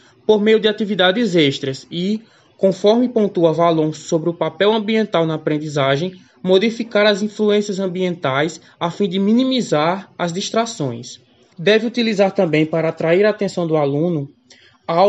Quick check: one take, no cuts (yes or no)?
no